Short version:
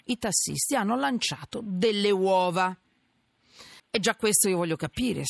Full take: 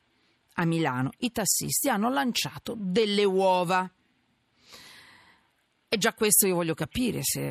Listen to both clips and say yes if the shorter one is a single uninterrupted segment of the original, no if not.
no